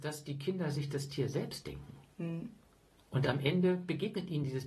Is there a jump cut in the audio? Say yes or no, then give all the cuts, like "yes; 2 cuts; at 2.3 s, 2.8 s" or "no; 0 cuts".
no; 0 cuts